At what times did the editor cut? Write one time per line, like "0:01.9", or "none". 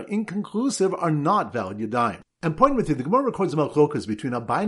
none